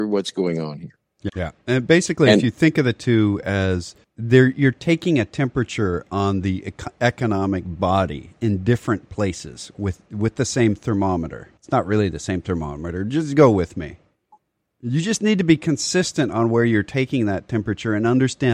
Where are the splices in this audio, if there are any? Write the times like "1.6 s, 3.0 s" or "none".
1.3 s